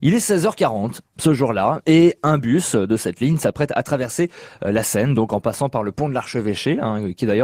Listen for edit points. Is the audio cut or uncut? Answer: uncut